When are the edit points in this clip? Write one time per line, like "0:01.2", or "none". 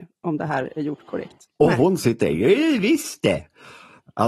0:01.5